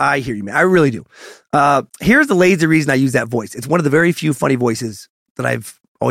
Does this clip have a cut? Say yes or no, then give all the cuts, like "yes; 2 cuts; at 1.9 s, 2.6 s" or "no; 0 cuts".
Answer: yes; 1 cut; at 1.9 s